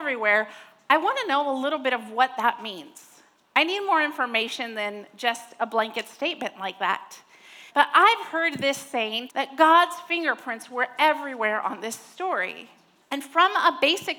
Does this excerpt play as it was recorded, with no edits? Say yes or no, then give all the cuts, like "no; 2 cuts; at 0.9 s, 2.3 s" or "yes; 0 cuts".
no; 3 cuts; at 7.7 s, 9.3 s, 13.0 s